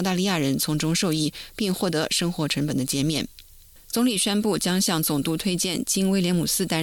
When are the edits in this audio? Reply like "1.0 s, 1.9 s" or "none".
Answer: none